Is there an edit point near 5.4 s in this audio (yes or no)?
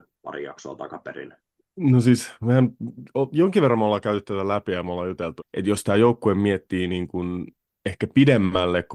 yes